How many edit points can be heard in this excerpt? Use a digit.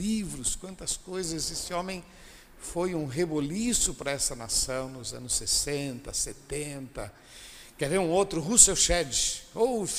0